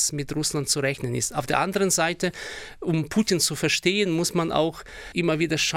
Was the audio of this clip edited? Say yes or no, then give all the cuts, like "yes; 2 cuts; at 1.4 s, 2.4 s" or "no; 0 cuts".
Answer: no; 0 cuts